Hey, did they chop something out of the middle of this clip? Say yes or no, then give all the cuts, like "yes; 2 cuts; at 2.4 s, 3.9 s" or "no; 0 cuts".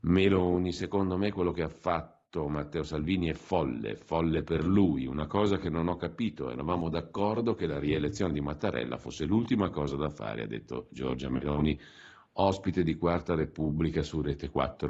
no; 0 cuts